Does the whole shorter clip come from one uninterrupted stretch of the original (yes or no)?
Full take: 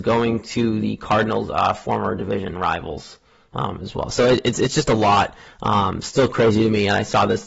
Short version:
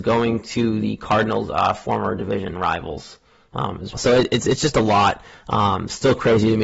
no